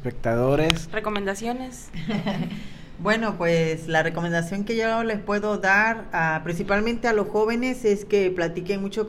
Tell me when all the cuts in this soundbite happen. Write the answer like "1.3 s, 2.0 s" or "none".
none